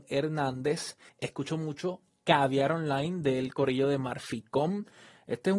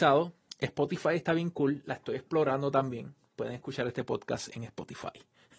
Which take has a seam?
first; 1 cut; at 1.1 s

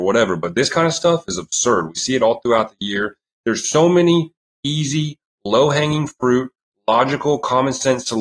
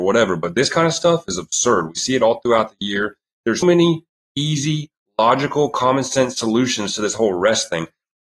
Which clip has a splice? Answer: second; 2 cuts; at 3.6 s, 5.1 s

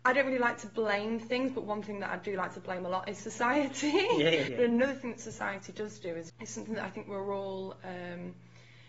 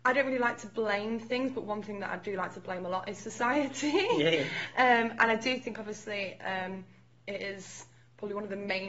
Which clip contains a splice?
first; 2 cuts; at 4.5 s, 6.3 s

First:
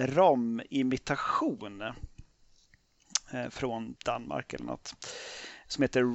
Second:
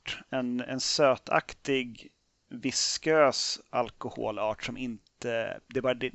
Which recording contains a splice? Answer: first; 1 cut; at 4.0 s

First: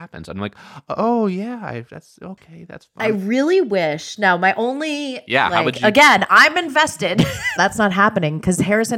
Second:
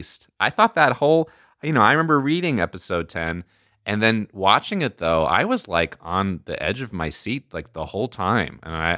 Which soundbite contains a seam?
first; 1 cut; at 7.6 s

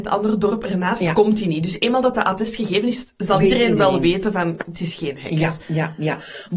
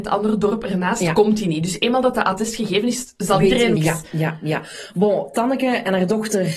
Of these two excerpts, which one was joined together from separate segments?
second; 1 cut; at 3.8 s

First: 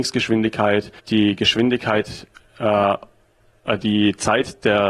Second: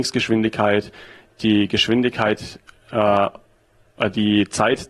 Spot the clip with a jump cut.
first; 1 cut; at 1.0 s

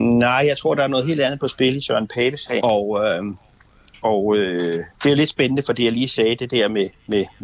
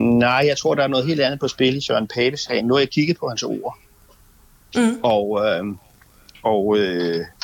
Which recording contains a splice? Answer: first; 1 cut; at 2.6 s

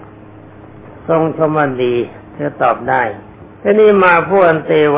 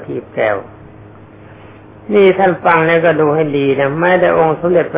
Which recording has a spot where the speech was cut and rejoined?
first; 1 cut; at 3.5 s

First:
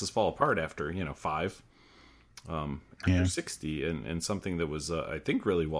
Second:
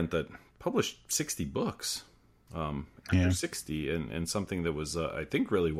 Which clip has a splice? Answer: second; 1 cut; at 2.5 s

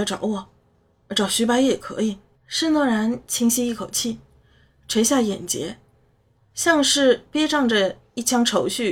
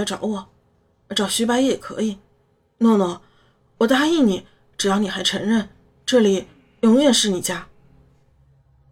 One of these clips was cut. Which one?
first; 2 cuts; at 2.3 s, 6.3 s

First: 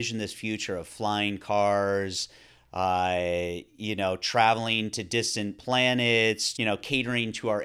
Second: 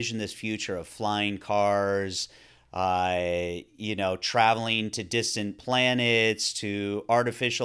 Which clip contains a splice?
first; 1 cut; at 6.5 s

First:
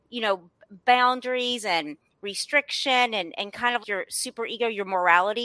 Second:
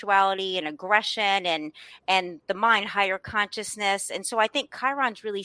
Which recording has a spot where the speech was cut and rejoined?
first; 1 cut; at 3.8 s

